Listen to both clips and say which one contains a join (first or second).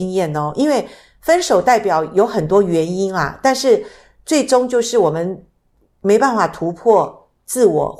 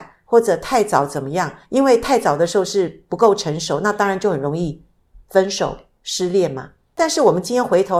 second